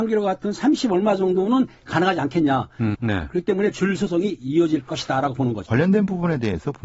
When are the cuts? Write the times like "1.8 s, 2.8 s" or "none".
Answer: 2.9 s, 5.7 s